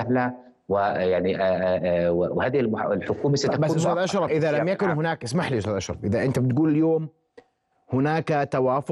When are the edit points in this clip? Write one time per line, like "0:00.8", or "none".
0:04.3